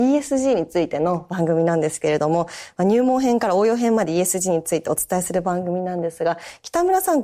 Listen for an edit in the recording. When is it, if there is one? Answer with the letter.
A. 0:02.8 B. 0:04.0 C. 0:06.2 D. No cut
D